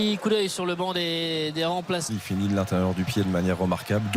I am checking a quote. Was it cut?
yes; 1 cut; at 2.1 s

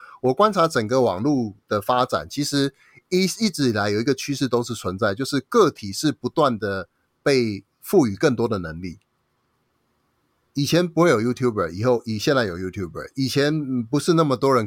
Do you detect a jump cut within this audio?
no; 0 cuts

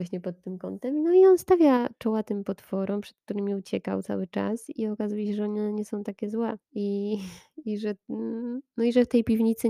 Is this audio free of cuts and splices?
no; 1 cut; at 6.6 s

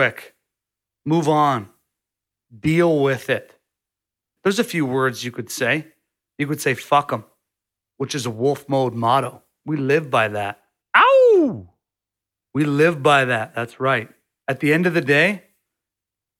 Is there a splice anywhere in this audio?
yes; 1 cut; at 4.4 s

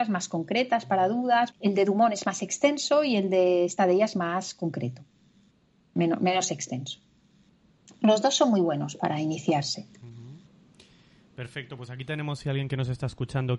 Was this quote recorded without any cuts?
no; 1 cut; at 1.5 s

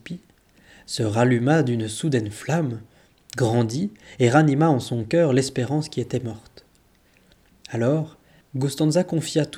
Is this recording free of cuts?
no; 1 cut; at 8.4 s

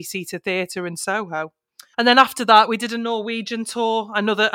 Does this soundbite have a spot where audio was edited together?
yes; 1 cut; at 1.9 s

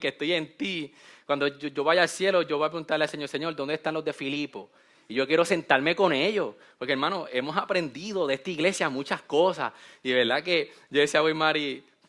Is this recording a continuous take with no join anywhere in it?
yes; 0 cuts

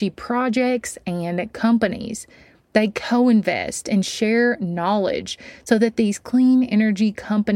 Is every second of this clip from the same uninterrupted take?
yes; 0 cuts

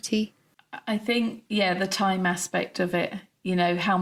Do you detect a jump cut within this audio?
yes; 1 cut; at 1.5 s

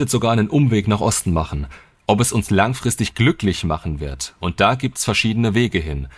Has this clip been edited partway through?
yes; 1 cut; at 2.0 s

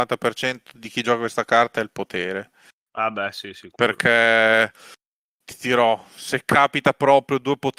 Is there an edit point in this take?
no; 0 cuts

